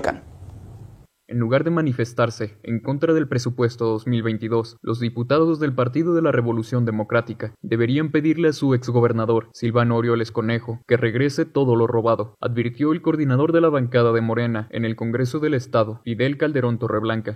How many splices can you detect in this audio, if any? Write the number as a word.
zero